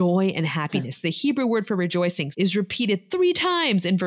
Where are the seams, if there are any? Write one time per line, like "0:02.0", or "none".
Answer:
0:02.3